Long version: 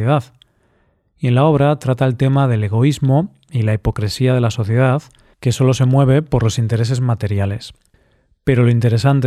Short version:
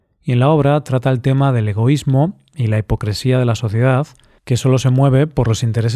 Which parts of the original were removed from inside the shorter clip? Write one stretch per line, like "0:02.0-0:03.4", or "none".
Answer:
none